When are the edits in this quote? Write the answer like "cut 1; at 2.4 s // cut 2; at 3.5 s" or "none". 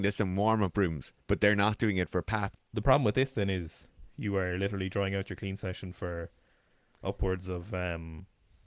cut 1; at 1.2 s // cut 2; at 2.6 s